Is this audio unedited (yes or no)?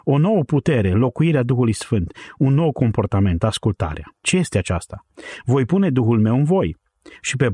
no